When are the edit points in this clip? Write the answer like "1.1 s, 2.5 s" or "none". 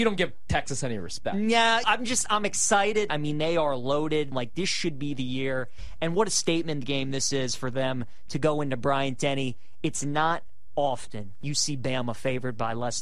1.8 s, 3.1 s, 4.3 s

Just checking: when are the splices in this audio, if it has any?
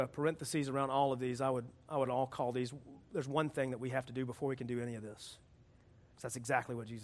6.1 s

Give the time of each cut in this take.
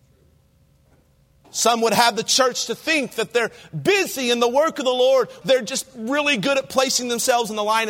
1.4 s, 5.4 s

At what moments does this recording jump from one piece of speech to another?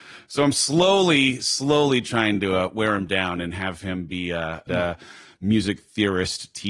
4.7 s

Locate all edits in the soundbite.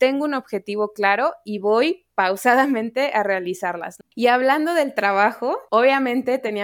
4.0 s, 5.7 s

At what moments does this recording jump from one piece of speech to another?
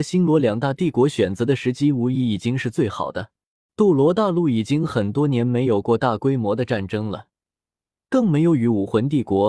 3.7 s

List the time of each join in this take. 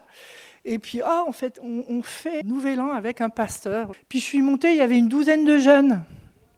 2.4 s, 3.9 s

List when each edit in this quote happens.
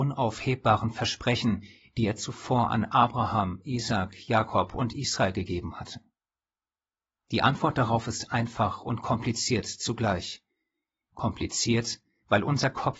none

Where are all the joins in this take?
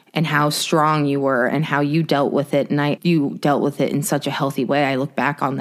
3.0 s

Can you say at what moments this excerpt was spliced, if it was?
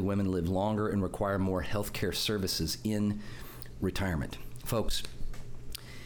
none

